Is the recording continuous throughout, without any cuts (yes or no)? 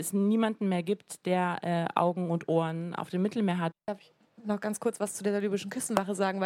no